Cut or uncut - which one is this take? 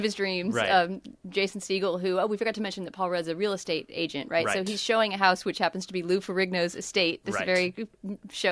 uncut